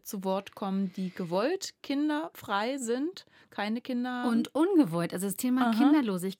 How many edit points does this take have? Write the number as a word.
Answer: zero